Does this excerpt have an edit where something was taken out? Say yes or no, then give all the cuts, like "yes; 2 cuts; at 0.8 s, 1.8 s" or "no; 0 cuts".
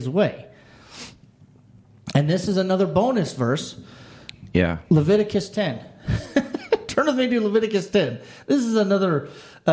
no; 0 cuts